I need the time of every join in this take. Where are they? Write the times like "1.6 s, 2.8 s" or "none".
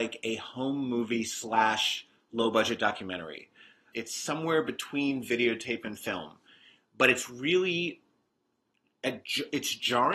3.9 s